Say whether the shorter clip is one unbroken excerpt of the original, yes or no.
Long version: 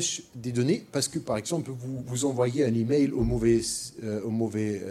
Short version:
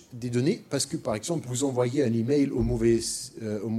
no